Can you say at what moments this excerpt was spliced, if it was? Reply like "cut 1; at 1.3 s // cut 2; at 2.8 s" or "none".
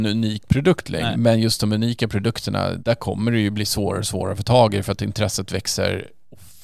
cut 1; at 1.1 s // cut 2; at 2.8 s